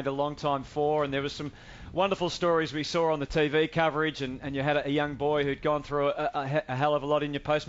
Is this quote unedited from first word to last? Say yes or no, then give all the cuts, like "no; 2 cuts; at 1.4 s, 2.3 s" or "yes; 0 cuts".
yes; 0 cuts